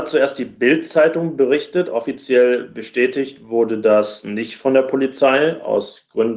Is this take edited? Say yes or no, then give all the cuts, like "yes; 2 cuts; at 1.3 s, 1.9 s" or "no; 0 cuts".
no; 0 cuts